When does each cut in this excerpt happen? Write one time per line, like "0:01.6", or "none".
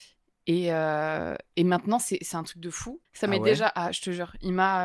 0:03.0